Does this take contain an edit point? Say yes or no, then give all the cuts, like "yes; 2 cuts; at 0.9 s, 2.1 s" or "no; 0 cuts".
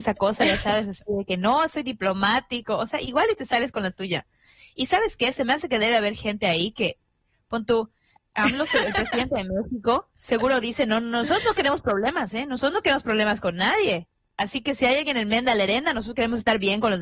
yes; 1 cut; at 8.2 s